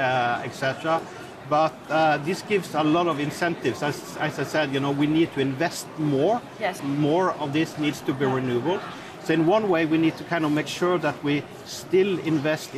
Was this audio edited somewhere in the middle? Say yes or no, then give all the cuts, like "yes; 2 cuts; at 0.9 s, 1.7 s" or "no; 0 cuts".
yes; 1 cut; at 6.8 s